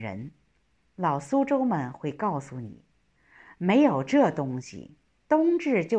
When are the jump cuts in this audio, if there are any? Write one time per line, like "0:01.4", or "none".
none